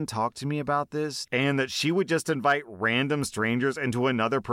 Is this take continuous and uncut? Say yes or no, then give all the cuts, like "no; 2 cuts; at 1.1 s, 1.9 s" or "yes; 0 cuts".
no; 1 cut; at 1.3 s